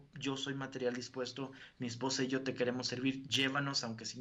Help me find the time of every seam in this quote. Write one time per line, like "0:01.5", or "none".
none